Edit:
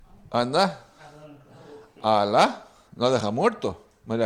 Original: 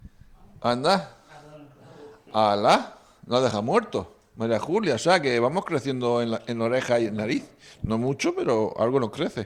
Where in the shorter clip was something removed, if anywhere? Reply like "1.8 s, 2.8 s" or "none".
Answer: none

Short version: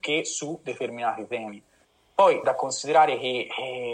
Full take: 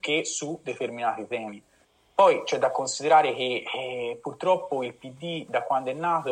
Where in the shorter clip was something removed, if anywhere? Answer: 2.4 s

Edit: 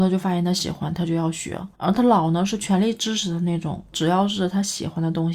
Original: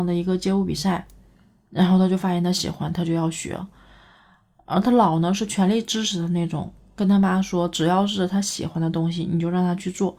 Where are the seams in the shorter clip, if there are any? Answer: 1.7 s, 3.9 s

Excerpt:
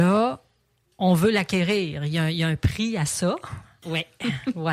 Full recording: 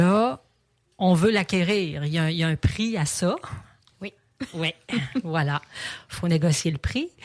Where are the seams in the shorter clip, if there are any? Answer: 3.8 s

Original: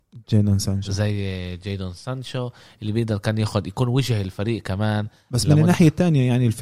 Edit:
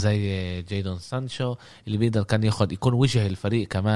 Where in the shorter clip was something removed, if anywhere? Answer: none

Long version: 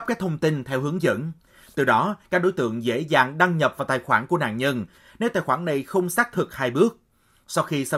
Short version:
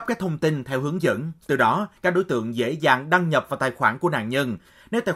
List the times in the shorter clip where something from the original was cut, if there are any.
1.4 s

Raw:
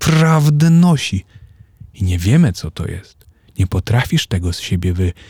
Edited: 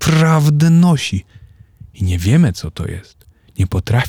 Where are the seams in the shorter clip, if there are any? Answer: none

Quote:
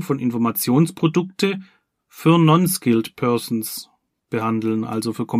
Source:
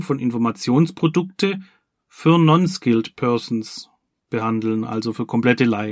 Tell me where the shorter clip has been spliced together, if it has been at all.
none

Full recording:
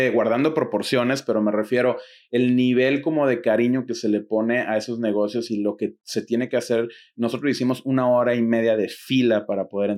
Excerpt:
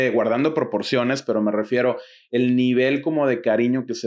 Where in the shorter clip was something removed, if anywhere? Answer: none

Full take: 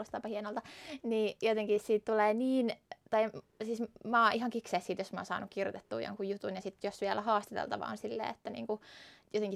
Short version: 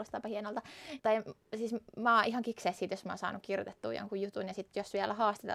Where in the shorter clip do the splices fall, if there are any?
1.0 s

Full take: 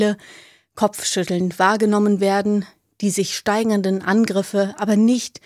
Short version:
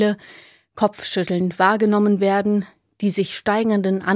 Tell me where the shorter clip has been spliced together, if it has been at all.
none

